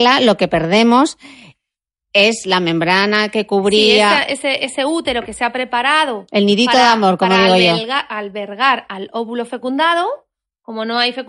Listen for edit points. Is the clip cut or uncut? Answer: uncut